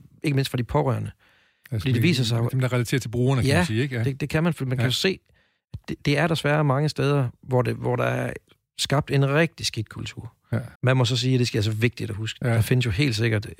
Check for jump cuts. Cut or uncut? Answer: cut